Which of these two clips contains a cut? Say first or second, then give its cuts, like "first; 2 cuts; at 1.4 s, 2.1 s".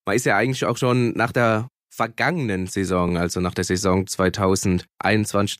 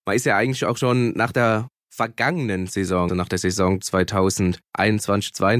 second; 1 cut; at 3.1 s